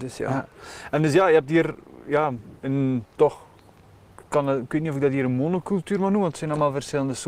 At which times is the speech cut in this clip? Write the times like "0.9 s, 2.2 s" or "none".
none